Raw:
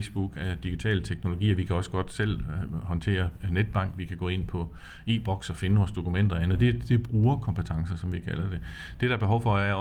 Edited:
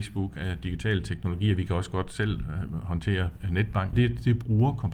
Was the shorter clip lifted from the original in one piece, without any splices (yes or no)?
no